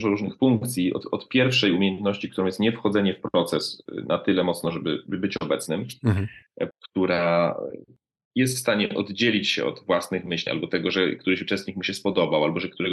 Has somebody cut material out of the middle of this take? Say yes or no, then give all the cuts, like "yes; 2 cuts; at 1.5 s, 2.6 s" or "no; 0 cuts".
yes; 2 cuts; at 6.7 s, 10.5 s